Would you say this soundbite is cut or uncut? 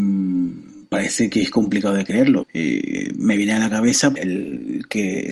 cut